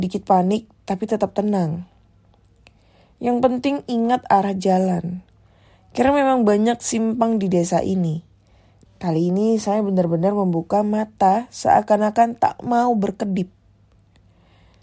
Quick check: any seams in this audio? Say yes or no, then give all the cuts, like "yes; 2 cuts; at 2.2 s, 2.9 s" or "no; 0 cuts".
yes; 1 cut; at 8.8 s